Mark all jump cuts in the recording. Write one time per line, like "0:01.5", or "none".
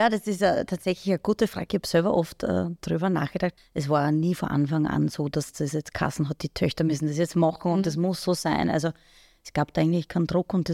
0:03.6